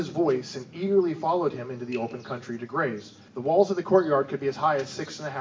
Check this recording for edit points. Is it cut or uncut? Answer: cut